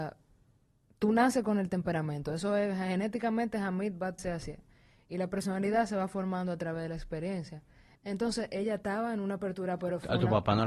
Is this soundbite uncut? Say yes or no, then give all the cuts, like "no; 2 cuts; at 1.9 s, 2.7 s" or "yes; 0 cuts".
no; 2 cuts; at 4.2 s, 8.0 s